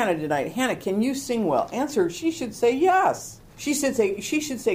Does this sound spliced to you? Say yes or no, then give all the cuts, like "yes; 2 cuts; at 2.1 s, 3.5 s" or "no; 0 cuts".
yes; 1 cut; at 3.5 s